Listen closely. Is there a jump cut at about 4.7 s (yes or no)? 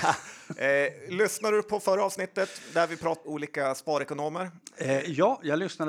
no